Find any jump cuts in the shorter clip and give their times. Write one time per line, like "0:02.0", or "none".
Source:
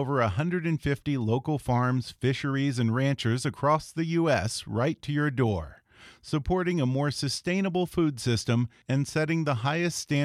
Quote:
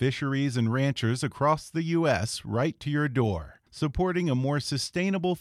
0:03.7